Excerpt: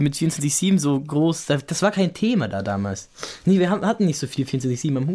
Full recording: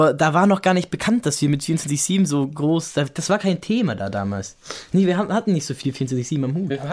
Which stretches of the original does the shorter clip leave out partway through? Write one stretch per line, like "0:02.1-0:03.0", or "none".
none